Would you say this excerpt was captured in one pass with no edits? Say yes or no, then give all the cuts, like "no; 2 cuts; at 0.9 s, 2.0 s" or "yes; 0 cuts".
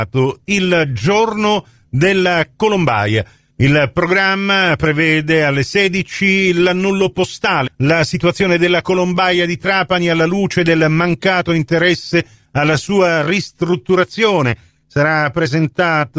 no; 2 cuts; at 3.5 s, 7.7 s